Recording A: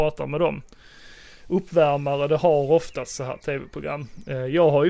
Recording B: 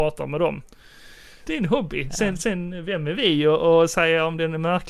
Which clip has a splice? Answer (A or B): B